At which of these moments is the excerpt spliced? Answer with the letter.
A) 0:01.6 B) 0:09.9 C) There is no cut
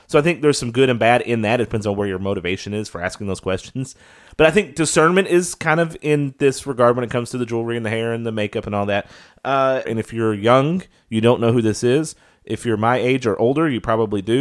B